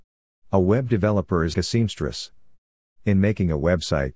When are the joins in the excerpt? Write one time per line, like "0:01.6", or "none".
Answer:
0:01.5